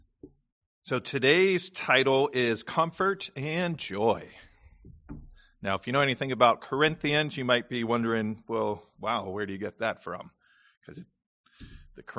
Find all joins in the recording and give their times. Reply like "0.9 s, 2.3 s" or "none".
none